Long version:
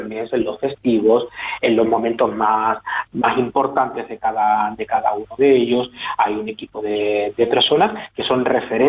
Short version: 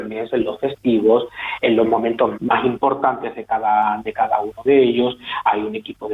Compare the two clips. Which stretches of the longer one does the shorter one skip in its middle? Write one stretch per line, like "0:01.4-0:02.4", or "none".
0:02.3-0:03.1